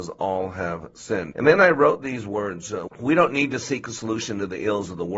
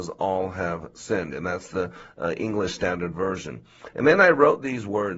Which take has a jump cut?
first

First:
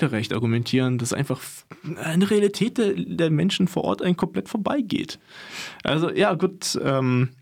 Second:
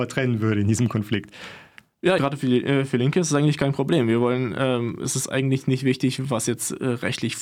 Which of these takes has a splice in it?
second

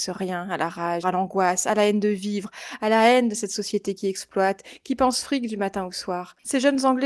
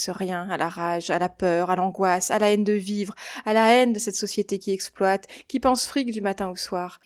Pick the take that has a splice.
first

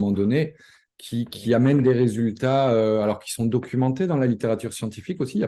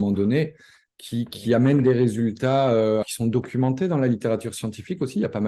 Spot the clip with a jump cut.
second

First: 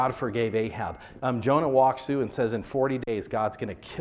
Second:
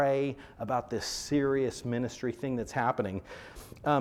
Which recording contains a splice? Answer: first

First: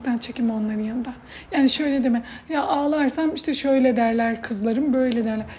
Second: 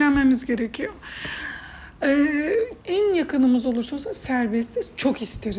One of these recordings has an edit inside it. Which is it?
second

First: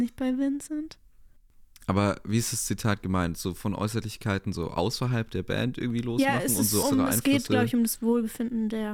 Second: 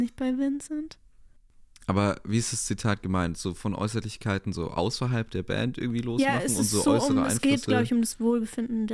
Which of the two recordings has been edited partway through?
first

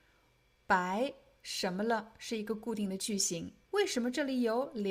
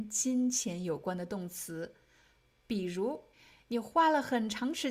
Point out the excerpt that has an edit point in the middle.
first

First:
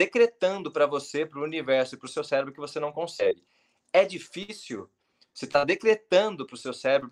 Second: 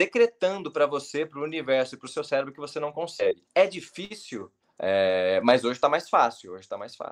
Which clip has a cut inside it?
second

